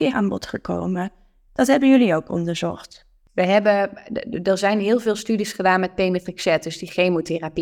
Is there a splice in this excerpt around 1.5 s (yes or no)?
yes